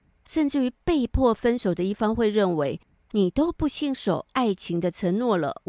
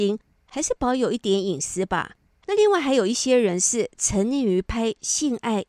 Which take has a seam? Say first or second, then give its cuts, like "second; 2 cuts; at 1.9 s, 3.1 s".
second; 1 cut; at 2.3 s